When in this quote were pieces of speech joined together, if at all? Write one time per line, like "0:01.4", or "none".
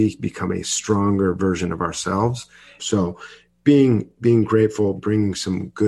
0:02.8
0:05.0